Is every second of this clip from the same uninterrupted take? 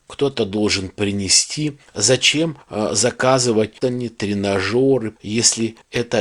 no; 2 cuts; at 3.8 s, 5.2 s

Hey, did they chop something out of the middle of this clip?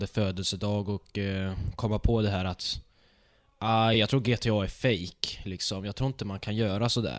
yes; 1 cut; at 3.9 s

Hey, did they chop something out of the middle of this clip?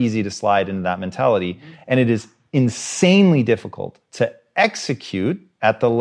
no; 0 cuts

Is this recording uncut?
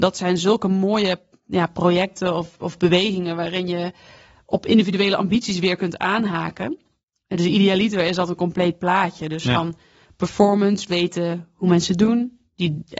yes; 0 cuts

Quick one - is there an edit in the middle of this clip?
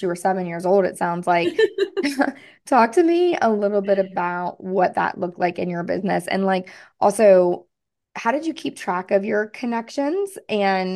no; 0 cuts

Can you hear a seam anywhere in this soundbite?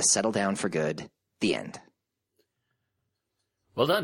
no; 0 cuts

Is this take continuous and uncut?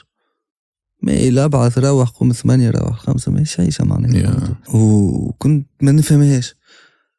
no; 1 cut; at 4.7 s

